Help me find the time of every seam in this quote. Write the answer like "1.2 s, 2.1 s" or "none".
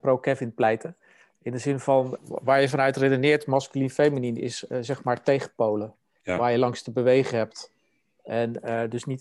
2.2 s